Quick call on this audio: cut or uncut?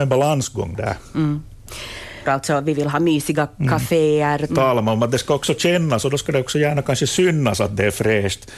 cut